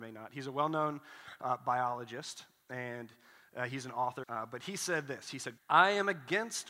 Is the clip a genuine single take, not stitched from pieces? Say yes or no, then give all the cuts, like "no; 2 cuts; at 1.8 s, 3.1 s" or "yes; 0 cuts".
no; 2 cuts; at 4.2 s, 5.6 s